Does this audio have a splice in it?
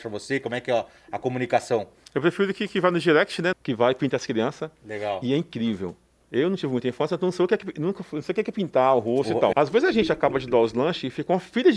yes; 2 cuts; at 3.5 s, 9.5 s

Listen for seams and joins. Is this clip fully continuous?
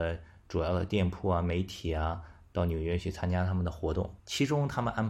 no; 1 cut; at 4.2 s

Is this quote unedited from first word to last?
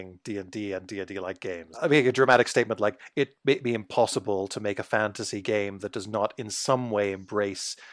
no; 1 cut; at 1.7 s

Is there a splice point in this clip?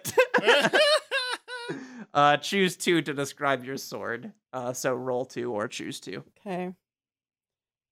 yes; 1 cut; at 4.4 s

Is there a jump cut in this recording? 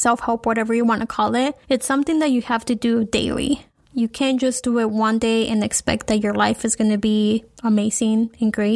no; 0 cuts

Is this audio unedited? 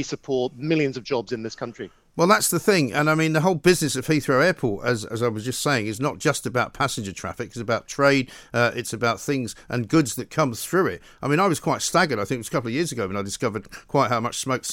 yes; 0 cuts

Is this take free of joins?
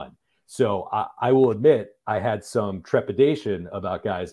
yes; 0 cuts

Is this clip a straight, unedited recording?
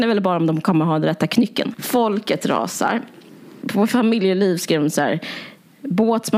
no; 1 cut; at 1.7 s

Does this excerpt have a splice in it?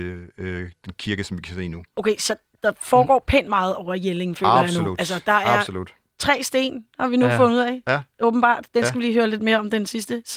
no; 0 cuts

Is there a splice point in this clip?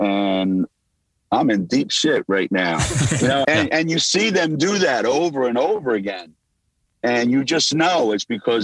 yes; 1 cut; at 3.4 s

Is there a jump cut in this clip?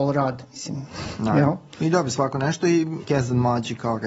yes; 1 cut; at 3.0 s

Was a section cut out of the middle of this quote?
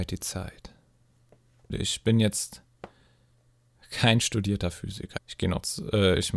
yes; 2 cuts; at 1.7 s, 5.2 s

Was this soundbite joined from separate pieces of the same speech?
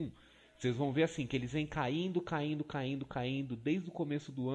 no; 0 cuts

